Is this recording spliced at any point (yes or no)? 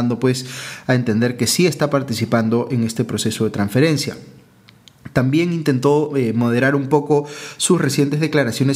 no